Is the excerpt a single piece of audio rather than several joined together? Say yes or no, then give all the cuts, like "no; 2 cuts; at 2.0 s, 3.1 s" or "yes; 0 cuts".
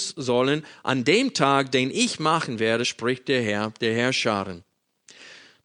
yes; 0 cuts